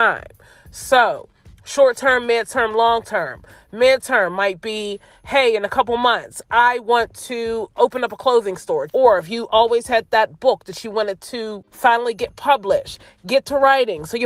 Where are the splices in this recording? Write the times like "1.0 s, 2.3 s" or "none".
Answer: 8.9 s